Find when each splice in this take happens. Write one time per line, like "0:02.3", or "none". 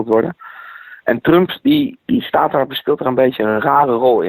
0:02.0